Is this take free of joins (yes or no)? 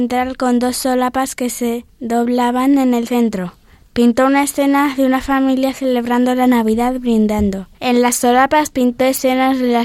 no